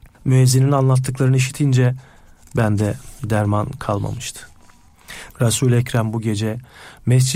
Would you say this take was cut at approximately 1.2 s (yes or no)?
no